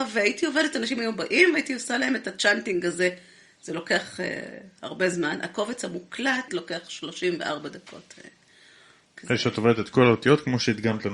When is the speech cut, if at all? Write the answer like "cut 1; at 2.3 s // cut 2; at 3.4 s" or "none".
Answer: cut 1; at 6.5 s